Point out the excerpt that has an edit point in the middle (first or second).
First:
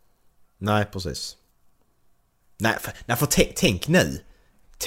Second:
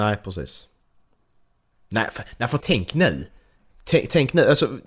second